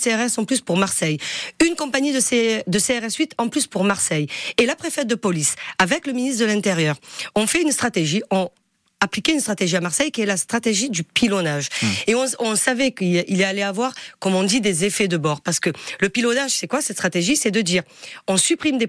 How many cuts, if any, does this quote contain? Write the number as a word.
zero